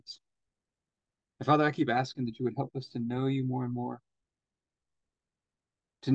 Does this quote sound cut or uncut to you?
cut